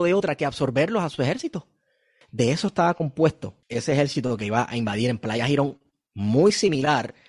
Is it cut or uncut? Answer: cut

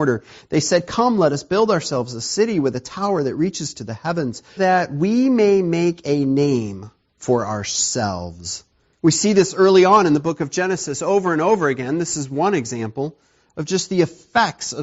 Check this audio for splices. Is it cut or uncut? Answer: cut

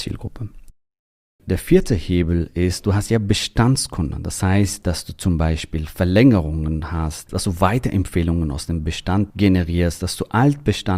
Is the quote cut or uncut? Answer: cut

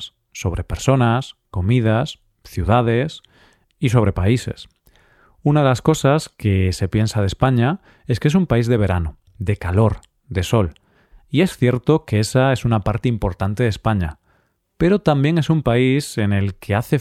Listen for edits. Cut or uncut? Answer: uncut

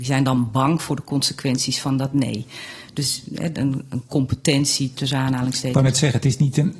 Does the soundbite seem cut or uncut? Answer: cut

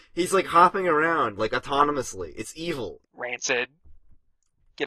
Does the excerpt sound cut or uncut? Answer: cut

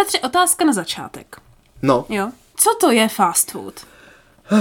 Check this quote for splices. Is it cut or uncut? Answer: uncut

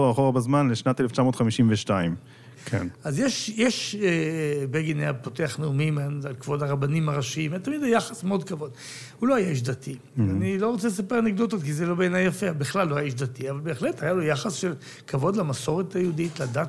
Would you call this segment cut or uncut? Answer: cut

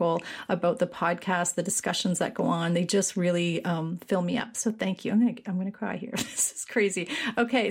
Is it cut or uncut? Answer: uncut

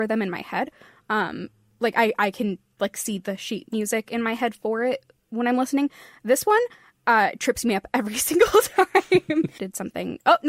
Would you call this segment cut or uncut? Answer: cut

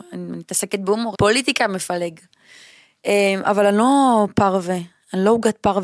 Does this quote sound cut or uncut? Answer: cut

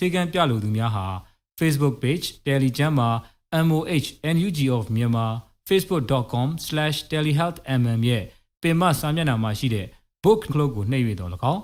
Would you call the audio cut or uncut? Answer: cut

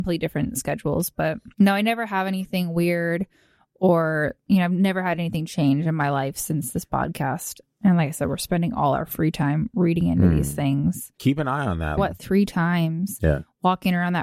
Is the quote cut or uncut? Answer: cut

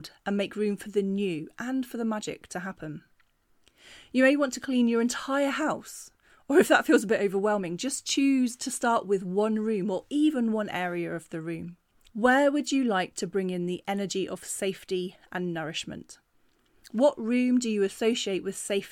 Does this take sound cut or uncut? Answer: cut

